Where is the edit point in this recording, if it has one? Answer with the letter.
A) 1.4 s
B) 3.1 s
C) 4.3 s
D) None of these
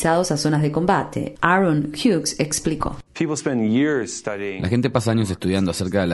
B